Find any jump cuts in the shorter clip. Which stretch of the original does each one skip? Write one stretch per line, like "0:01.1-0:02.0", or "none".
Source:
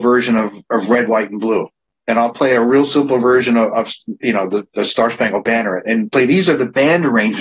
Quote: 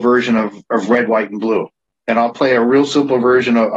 none